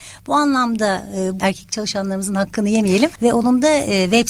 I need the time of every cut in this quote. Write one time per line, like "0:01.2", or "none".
0:01.4
0:03.2